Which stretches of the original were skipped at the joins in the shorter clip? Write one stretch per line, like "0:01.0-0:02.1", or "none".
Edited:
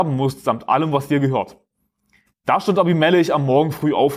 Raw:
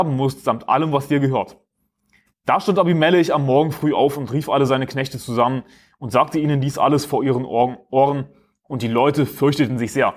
none